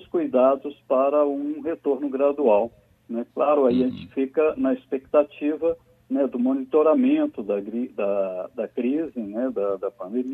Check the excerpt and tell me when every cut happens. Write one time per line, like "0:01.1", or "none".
0:03.3